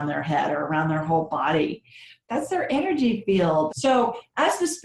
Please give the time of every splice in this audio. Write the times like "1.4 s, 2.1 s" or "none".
2.3 s, 3.7 s